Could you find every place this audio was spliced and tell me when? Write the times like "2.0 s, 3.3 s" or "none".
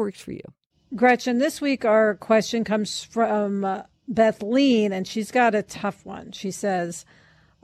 none